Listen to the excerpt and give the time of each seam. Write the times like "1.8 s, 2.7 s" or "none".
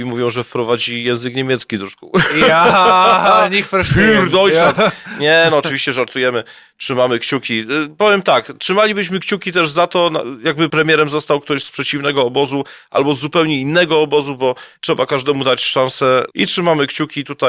14.7 s, 16.3 s